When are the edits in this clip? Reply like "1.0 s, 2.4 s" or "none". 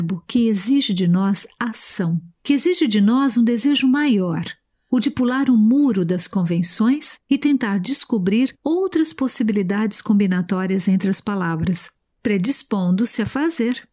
12.1 s